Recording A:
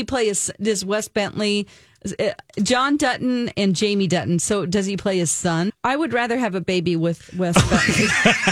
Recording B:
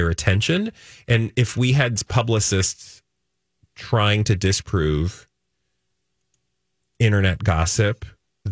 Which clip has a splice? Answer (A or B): A